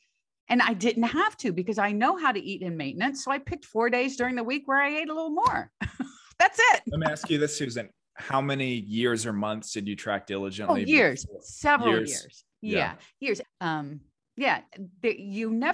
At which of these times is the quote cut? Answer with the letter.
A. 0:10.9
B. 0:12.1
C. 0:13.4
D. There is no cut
C